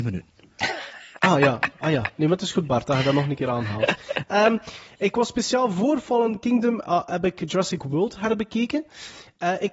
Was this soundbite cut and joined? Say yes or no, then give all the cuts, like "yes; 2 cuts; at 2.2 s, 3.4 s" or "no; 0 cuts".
no; 0 cuts